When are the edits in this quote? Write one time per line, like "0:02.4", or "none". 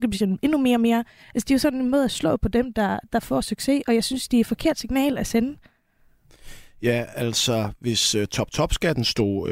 none